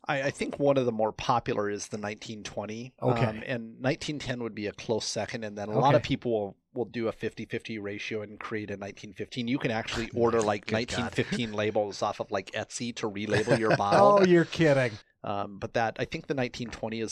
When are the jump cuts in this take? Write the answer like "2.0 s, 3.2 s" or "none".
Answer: 15.0 s

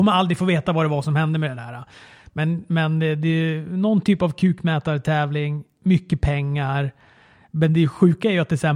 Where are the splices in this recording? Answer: none

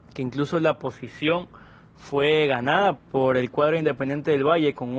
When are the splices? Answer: 3.0 s

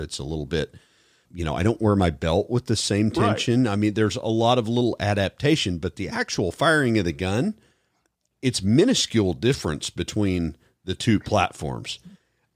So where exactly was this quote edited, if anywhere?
1.2 s

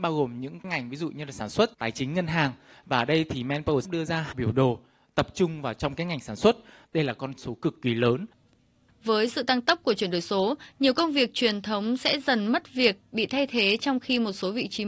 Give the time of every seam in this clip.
1.7 s, 6.8 s

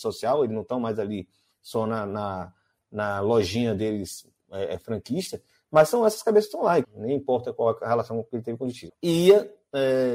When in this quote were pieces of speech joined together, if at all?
6.8 s, 8.9 s

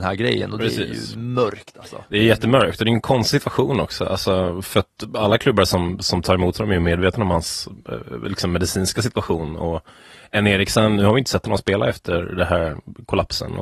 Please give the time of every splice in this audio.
none

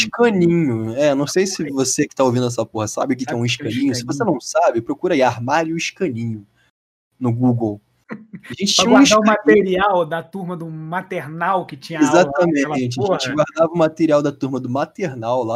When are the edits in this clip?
none

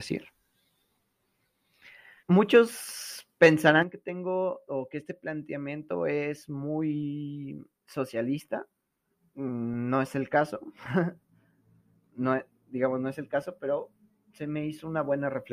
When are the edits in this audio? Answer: 2.2 s

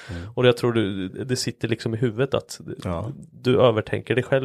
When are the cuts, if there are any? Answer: 1.1 s

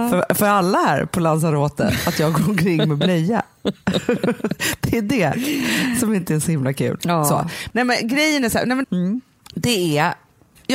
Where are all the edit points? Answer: 7.0 s, 8.8 s

